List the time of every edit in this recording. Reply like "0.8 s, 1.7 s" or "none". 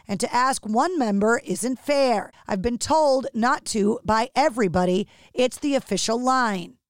2.3 s